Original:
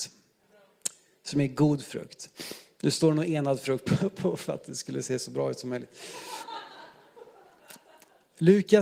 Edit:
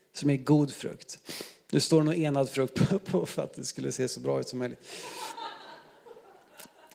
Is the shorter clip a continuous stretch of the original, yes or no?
yes